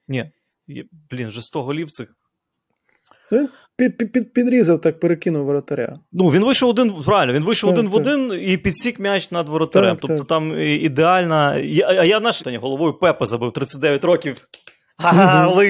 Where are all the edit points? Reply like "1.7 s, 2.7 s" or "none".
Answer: 12.4 s